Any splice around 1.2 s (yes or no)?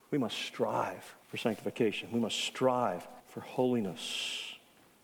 yes